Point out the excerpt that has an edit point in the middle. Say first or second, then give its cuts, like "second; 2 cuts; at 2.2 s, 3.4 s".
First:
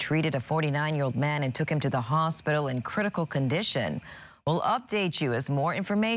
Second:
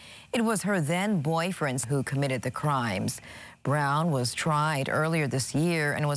second; 1 cut; at 1.8 s